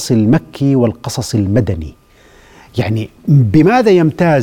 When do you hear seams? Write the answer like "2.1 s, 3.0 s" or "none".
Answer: 3.2 s